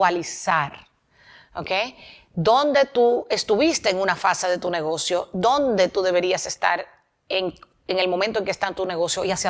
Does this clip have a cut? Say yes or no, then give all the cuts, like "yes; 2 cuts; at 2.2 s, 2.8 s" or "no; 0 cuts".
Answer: no; 0 cuts